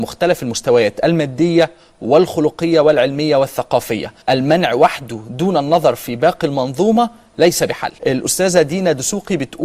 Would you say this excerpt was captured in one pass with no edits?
no; 2 cuts; at 4.2 s, 8.0 s

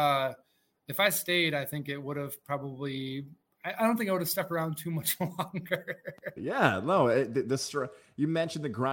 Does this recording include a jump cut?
yes; 1 cut; at 6.4 s

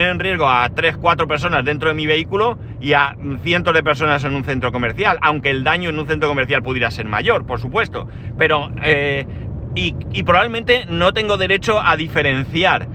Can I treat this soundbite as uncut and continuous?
no; 1 cut; at 8.4 s

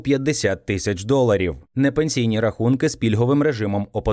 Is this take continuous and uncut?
yes; 0 cuts

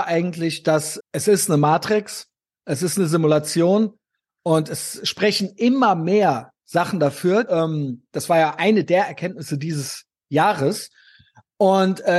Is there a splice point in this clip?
yes; 2 cuts; at 1.0 s, 7.5 s

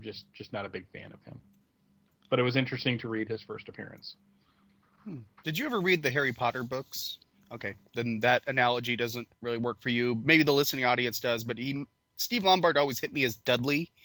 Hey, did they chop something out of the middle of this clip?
yes; 1 cut; at 7.3 s

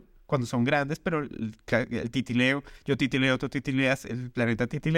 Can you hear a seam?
no; 0 cuts

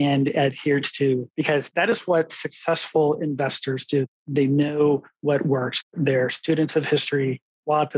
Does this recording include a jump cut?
no; 0 cuts

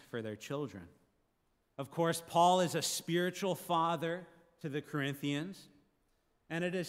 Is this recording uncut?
no; 1 cut; at 1.6 s

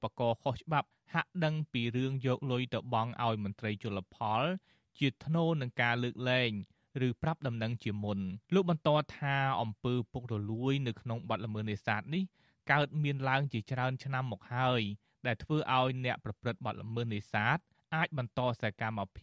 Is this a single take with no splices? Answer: no; 1 cut; at 8.4 s

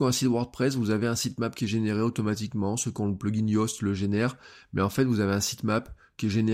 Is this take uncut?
yes; 0 cuts

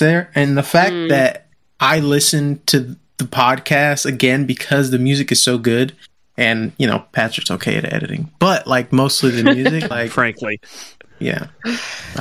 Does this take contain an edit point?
yes; 1 cut; at 9.9 s

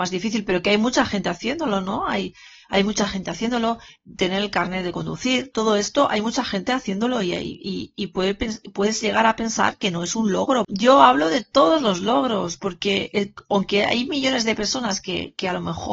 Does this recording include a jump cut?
no; 0 cuts

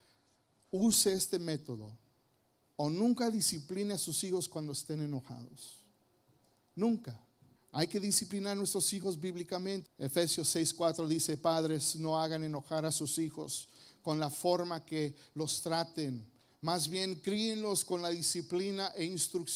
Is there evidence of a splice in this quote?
yes; 2 cuts; at 7.6 s, 9.9 s

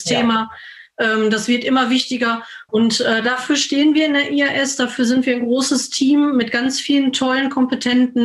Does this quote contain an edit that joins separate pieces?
yes; 1 cut; at 2.7 s

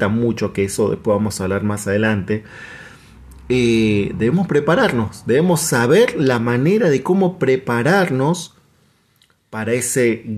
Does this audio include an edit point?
no; 0 cuts

